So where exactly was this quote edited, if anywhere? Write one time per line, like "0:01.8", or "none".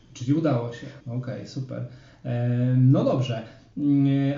0:01.0